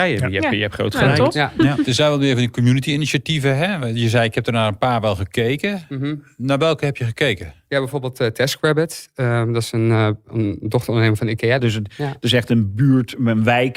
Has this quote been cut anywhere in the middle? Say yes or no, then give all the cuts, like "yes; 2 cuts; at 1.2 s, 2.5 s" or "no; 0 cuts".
yes; 1 cut; at 11.6 s